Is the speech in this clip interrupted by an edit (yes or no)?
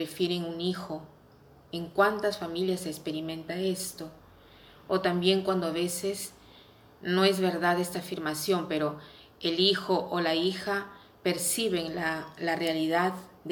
no